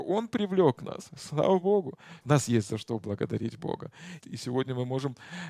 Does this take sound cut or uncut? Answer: cut